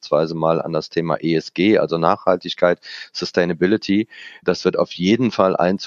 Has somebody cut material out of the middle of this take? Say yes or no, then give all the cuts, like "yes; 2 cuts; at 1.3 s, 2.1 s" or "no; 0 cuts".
no; 0 cuts